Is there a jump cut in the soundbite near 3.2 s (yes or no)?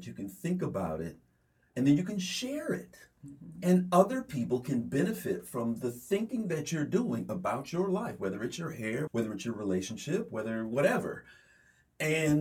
no